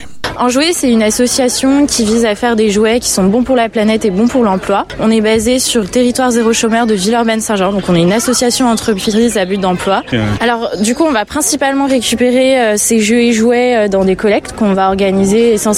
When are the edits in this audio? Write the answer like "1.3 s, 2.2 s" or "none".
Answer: 5.8 s, 10.1 s